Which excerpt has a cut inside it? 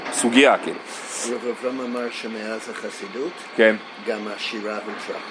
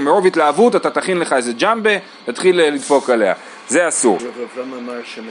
second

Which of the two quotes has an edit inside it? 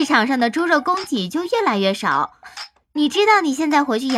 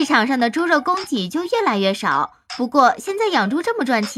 first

